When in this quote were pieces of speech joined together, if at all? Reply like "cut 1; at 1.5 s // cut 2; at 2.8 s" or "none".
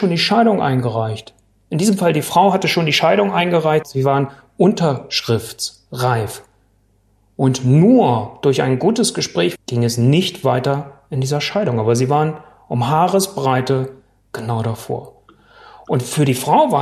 cut 1; at 3.8 s // cut 2; at 9.6 s